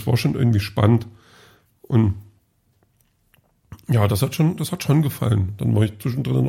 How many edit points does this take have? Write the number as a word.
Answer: zero